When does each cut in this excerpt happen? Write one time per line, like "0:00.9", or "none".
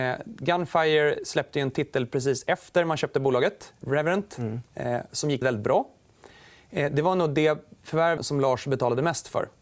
0:03.8
0:05.4
0:08.2